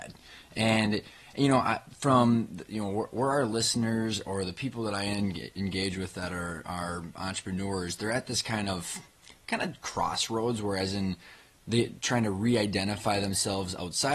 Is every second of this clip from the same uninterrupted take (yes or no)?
yes